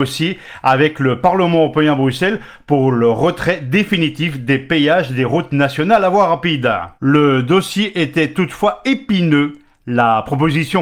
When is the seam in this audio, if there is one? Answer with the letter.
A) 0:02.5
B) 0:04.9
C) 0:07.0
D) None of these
D